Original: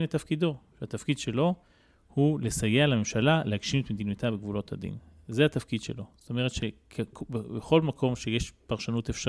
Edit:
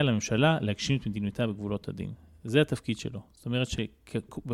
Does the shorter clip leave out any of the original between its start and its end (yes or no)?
no